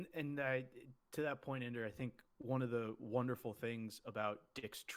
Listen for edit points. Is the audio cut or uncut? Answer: uncut